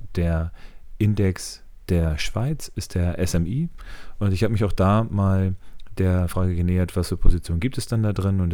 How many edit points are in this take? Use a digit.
0